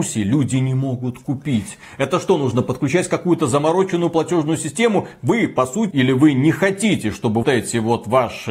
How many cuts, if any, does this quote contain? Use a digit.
2